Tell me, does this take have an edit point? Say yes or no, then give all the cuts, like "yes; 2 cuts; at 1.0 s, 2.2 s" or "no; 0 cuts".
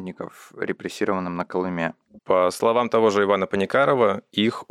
yes; 1 cut; at 2.2 s